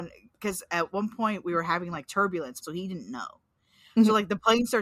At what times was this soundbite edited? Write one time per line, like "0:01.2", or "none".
0:02.6